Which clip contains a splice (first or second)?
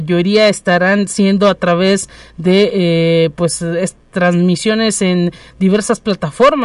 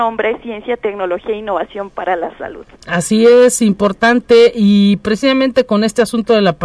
second